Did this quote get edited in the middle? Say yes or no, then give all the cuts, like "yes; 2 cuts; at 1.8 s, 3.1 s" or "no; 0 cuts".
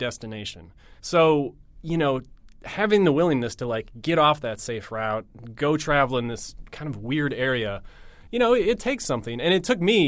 yes; 1 cut; at 1.0 s